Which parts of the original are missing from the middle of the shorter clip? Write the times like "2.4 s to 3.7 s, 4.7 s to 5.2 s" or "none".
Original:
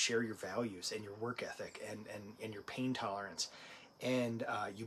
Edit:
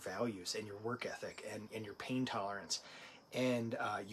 2.0 s to 2.4 s